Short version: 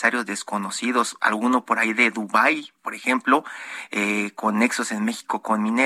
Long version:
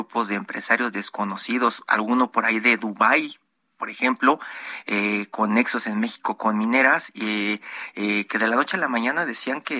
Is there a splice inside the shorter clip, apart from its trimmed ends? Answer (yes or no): yes